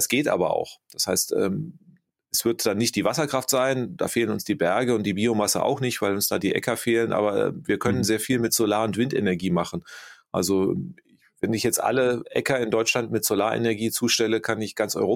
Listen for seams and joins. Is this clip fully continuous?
yes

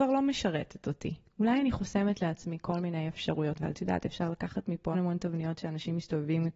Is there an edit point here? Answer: yes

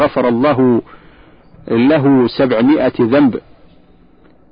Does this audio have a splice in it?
no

